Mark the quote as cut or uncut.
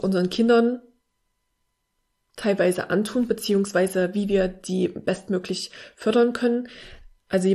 uncut